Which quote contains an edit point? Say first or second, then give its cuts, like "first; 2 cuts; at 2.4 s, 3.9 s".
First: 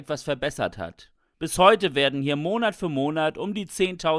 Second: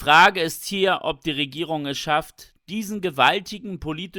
first; 1 cut; at 1.3 s